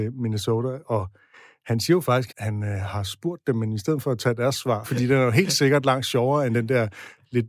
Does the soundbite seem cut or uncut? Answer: cut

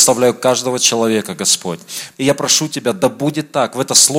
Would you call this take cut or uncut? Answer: cut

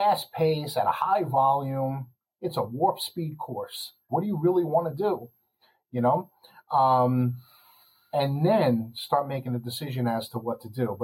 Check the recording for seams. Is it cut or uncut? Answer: cut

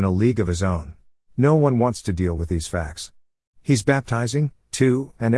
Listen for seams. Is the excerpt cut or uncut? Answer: cut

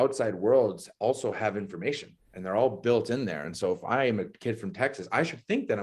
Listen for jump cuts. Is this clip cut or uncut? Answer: uncut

